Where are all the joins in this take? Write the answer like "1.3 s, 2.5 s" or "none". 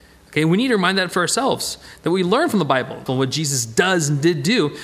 3.1 s